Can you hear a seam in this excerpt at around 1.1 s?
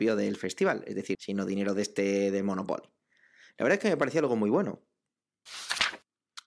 yes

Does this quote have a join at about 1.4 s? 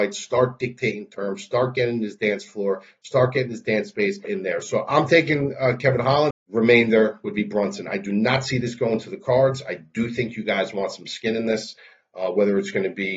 no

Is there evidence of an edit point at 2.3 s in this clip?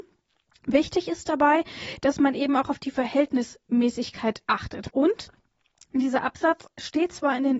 no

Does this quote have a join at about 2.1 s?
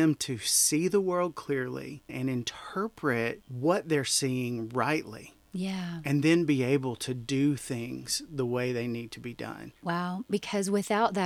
yes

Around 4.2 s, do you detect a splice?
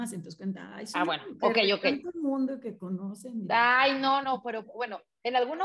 yes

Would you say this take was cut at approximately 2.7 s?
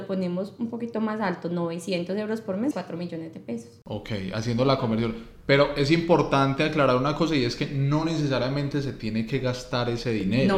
yes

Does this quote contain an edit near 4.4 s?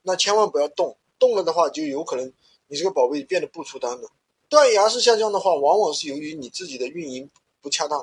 yes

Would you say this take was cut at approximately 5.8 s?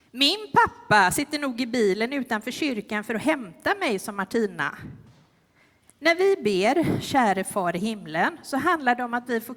yes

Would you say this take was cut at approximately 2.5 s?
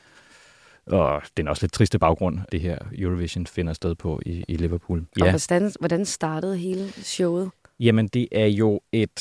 yes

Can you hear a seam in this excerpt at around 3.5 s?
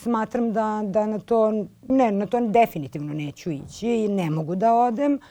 no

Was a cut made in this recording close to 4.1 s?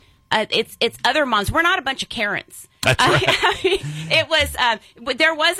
no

